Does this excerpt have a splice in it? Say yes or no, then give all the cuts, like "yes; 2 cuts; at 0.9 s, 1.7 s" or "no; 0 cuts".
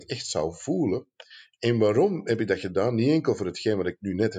no; 0 cuts